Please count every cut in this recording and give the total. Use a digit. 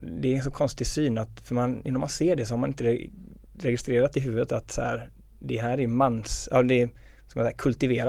1